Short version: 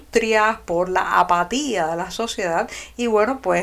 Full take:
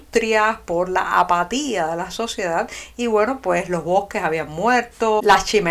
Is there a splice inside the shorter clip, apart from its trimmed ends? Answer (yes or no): no